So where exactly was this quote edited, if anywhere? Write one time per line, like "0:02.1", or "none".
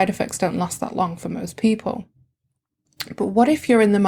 none